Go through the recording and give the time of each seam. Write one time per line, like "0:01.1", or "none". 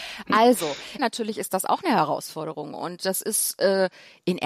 0:01.0